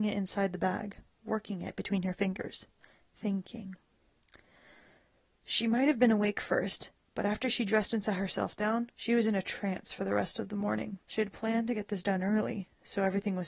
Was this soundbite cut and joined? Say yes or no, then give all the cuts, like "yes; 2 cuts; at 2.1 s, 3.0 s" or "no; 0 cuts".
yes; 2 cuts; at 8.9 s, 11.0 s